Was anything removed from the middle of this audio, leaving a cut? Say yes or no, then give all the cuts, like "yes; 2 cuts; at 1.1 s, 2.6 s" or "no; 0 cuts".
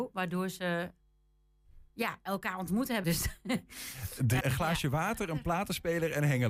yes; 2 cuts; at 3.0 s, 4.4 s